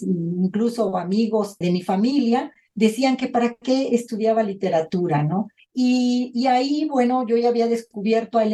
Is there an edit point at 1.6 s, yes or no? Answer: yes